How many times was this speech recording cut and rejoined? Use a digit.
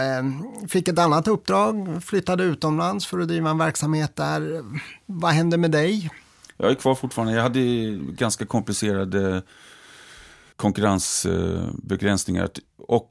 1